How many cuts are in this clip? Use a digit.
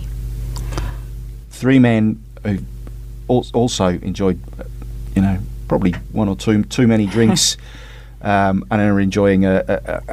1